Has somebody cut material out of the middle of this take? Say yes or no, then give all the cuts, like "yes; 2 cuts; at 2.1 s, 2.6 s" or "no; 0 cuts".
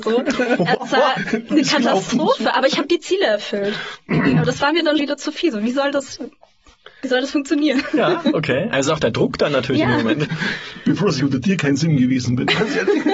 yes; 2 cuts; at 5.0 s, 10.2 s